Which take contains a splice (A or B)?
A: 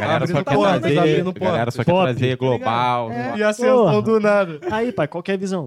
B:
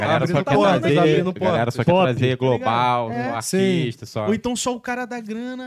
A